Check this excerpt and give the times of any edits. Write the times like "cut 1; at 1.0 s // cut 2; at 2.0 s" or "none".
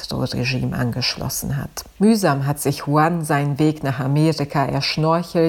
cut 1; at 2.0 s

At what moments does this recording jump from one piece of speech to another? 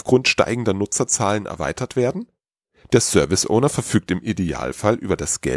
none

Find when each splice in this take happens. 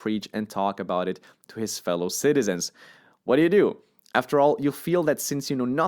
none

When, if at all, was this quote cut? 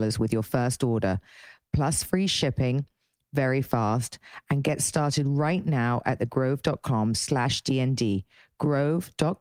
none

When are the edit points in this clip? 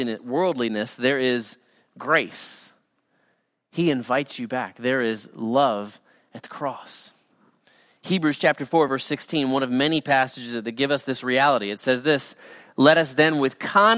none

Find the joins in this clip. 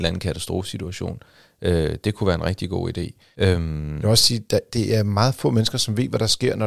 none

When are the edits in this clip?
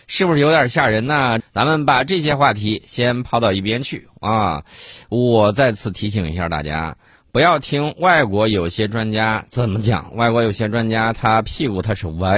cut 1; at 1.4 s

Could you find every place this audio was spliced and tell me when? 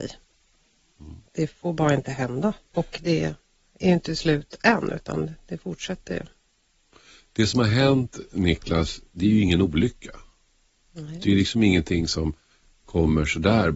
cut 1; at 1.3 s // cut 2; at 2.7 s

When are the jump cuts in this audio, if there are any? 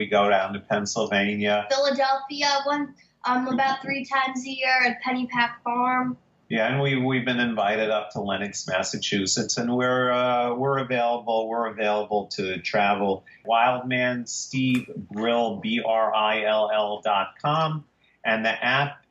none

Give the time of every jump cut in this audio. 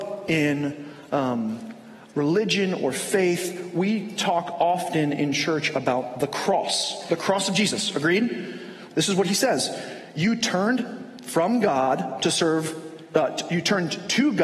cut 1; at 8.9 s

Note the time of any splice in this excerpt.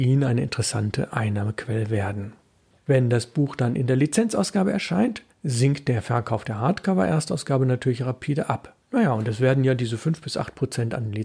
cut 1; at 2.7 s // cut 2; at 8.8 s

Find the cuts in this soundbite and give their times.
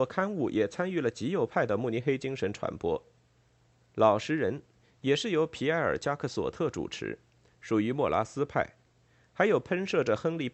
none

